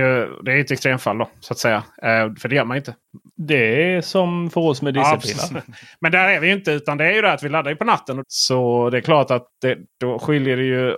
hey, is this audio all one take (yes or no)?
no